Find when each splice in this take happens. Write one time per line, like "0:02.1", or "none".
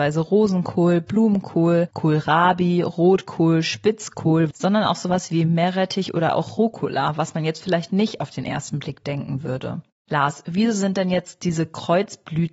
0:04.5